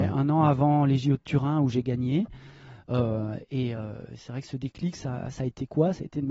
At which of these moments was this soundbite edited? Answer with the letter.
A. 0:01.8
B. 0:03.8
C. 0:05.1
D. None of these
D